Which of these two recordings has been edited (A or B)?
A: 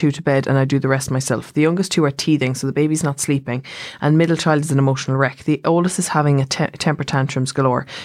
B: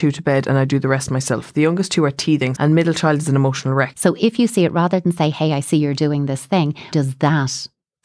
B